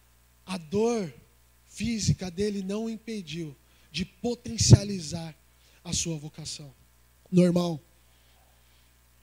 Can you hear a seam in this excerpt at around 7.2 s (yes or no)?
yes